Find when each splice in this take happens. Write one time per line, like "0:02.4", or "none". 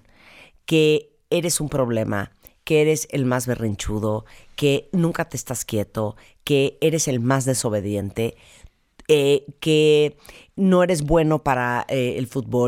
none